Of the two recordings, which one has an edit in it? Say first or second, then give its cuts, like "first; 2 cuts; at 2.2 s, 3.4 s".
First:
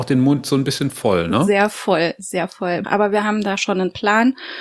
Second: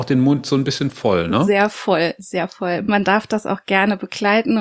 first; 1 cut; at 2.8 s